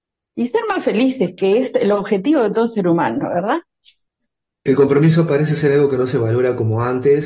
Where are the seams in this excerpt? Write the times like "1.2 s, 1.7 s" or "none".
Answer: 4.6 s